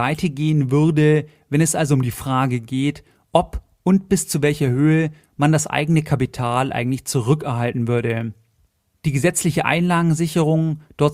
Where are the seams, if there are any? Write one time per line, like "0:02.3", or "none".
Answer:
none